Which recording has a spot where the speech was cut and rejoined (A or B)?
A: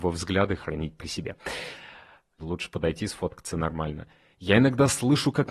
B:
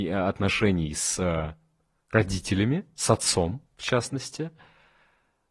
A